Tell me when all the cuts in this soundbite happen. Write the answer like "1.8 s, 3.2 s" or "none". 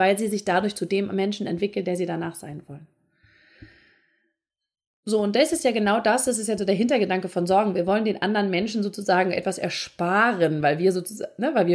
none